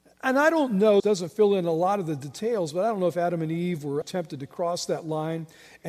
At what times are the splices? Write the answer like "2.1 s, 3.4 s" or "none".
1.0 s, 4.0 s